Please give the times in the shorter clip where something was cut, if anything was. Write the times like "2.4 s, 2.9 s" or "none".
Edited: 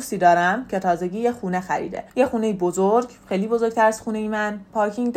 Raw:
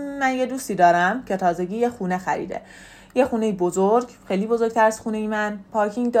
2.1 s